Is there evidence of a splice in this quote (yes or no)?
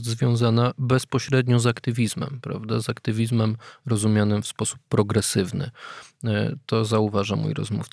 no